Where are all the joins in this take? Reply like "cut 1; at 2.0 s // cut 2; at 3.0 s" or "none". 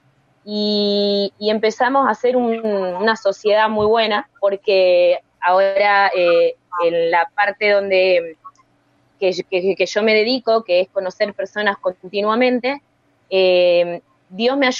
none